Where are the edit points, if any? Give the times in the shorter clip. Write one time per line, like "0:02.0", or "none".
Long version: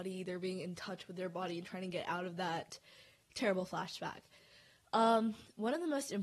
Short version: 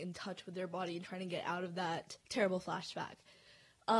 0:02.2